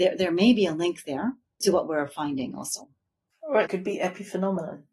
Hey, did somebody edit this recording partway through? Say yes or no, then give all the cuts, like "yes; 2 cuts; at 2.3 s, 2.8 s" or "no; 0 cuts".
no; 0 cuts